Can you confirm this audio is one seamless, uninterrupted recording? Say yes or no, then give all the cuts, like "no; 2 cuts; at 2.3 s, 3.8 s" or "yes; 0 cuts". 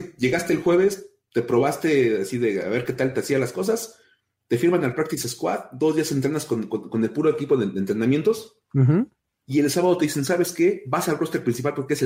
yes; 0 cuts